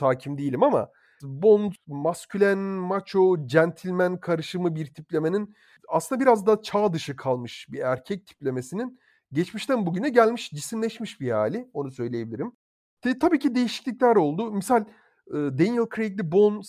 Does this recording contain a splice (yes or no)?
no